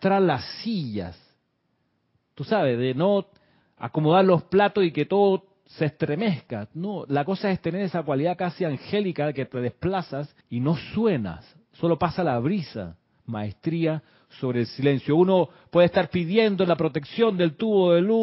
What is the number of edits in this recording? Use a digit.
1